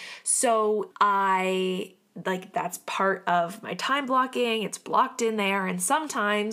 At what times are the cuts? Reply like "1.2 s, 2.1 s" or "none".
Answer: 0.9 s